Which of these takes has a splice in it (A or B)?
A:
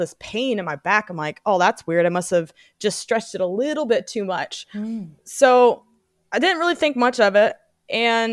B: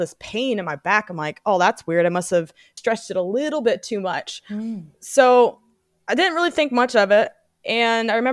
B